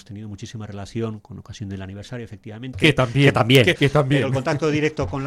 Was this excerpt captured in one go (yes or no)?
no